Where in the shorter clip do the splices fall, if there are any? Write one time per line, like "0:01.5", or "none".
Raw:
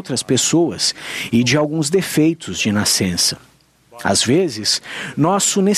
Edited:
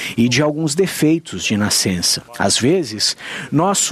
0:02.3